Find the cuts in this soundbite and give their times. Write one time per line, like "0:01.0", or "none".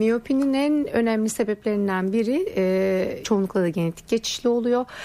0:03.2